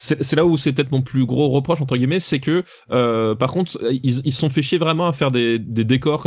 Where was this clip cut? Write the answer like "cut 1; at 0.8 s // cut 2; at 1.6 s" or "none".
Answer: none